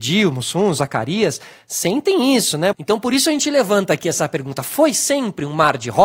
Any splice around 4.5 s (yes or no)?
no